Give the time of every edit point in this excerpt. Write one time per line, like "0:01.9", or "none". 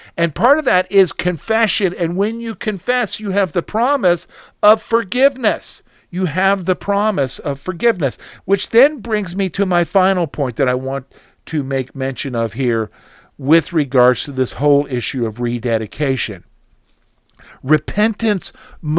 none